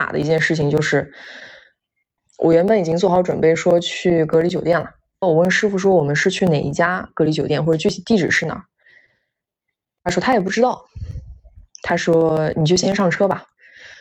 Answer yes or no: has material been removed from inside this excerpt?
yes